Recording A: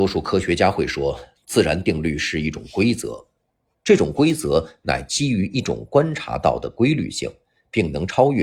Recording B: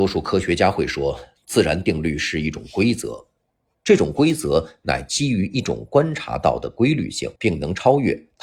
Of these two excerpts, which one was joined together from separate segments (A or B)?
B